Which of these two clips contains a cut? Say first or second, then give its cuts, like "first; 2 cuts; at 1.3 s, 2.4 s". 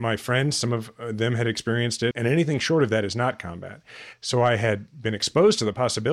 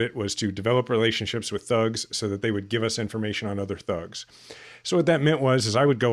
first; 2 cuts; at 2.1 s, 4.1 s